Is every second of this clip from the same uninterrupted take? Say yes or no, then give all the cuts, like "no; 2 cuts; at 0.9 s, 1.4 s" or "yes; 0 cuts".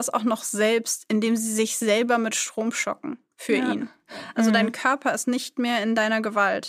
no; 1 cut; at 4.3 s